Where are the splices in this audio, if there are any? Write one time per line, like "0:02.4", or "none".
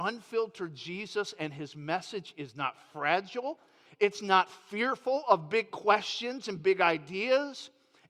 0:03.9